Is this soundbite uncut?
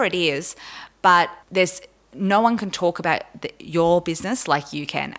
no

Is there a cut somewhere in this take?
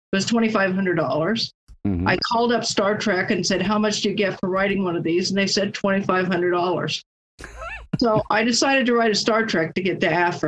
no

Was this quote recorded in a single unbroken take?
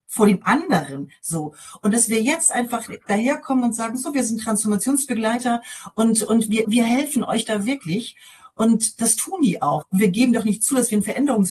no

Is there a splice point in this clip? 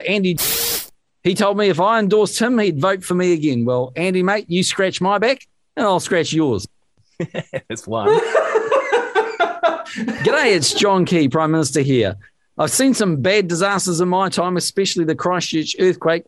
no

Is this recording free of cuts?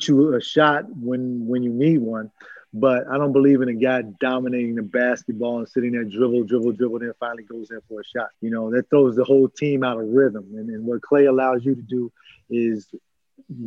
no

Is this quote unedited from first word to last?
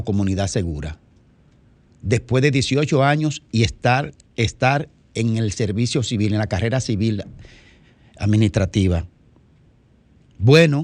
yes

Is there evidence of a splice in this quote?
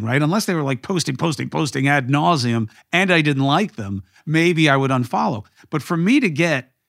no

